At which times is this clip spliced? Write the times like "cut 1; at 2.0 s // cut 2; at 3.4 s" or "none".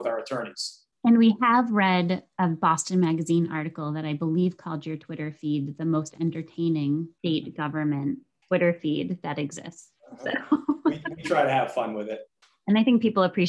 none